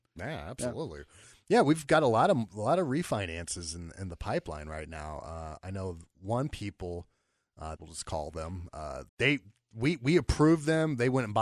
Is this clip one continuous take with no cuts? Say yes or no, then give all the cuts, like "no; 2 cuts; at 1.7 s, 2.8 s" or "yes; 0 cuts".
no; 2 cuts; at 7.8 s, 9.1 s